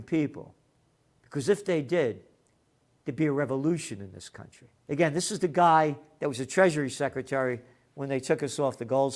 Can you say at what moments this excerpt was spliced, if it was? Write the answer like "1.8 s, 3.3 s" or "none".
4.8 s